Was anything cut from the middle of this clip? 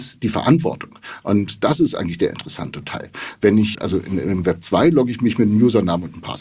yes; 1 cut; at 3.7 s

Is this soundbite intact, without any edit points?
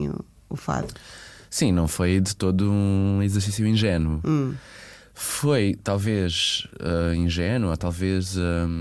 yes; 0 cuts

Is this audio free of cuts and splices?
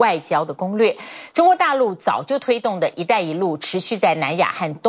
yes; 0 cuts

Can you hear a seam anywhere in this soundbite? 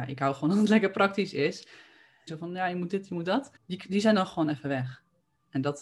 yes; 2 cuts; at 2.3 s, 3.6 s

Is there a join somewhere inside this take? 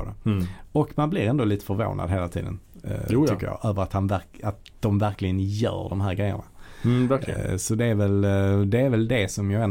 no; 0 cuts

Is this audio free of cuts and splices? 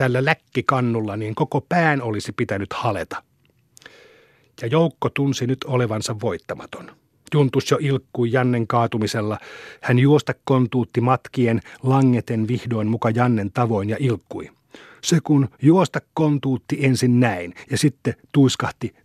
yes; 0 cuts

